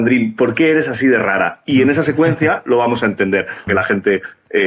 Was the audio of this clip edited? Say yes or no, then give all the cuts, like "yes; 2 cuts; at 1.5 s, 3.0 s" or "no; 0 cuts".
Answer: yes; 1 cut; at 3.7 s